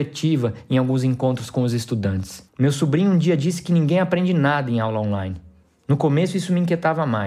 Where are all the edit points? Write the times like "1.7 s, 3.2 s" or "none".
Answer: 2.5 s